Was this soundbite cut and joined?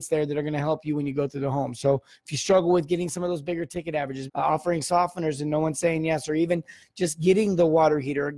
yes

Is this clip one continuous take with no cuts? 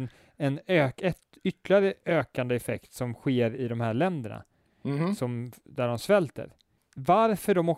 yes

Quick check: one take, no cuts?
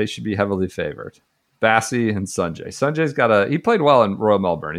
yes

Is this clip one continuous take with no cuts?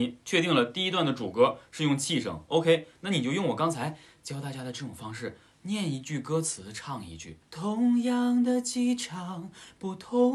no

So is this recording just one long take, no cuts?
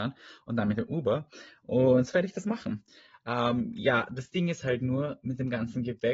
yes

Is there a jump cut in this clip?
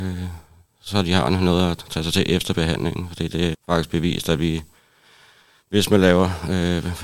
yes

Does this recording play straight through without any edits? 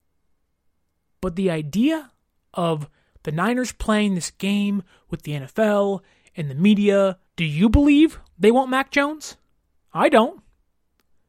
no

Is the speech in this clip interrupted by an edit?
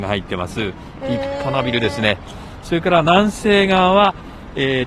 yes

